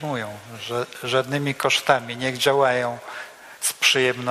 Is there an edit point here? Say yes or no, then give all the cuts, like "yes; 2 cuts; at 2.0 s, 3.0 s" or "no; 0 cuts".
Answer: no; 0 cuts